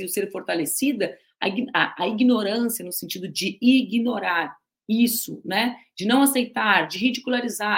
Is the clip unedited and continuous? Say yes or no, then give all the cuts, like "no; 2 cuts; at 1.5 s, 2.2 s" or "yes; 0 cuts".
yes; 0 cuts